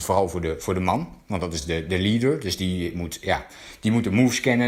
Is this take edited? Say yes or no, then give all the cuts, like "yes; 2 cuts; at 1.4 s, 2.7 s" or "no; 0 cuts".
no; 0 cuts